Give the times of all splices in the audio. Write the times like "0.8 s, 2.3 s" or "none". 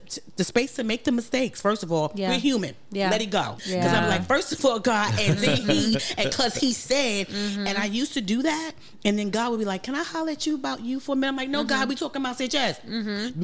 3.6 s